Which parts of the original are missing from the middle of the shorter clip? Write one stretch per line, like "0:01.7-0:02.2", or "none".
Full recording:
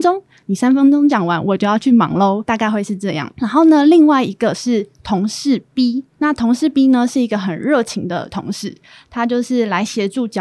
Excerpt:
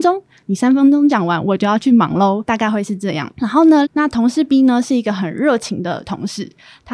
0:03.8-0:06.1